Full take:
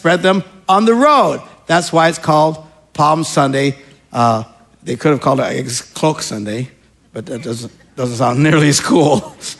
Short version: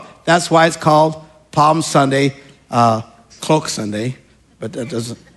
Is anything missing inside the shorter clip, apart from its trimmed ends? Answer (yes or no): yes